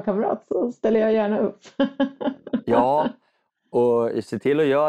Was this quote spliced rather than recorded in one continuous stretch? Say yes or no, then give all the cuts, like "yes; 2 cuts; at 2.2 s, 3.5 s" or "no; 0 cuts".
no; 0 cuts